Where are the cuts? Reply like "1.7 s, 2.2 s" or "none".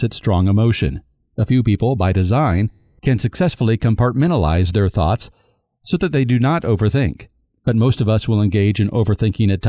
none